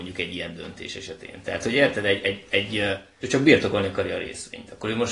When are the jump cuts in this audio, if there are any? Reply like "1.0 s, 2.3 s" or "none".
3.2 s